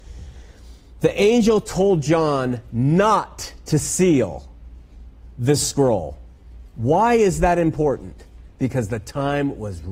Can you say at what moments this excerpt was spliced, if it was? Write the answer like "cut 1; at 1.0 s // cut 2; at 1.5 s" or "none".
none